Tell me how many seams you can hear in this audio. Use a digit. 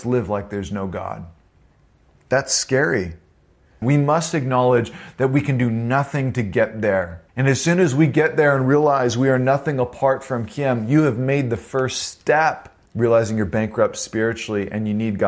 3